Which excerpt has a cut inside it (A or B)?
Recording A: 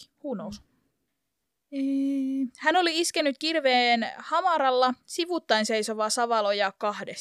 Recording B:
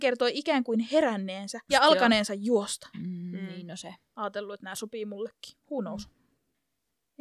B